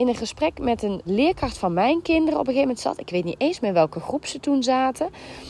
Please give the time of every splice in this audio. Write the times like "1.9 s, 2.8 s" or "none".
1.1 s